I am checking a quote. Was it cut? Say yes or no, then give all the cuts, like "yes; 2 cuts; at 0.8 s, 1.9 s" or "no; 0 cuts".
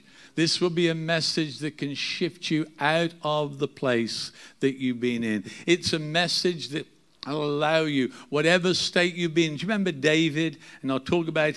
no; 0 cuts